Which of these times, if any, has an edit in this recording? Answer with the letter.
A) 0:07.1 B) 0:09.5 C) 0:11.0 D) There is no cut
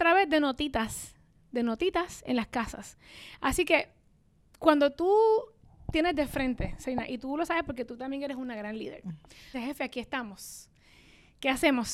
B